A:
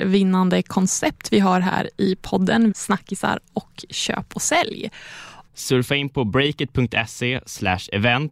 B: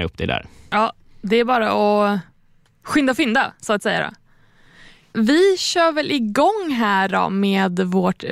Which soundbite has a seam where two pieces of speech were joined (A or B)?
A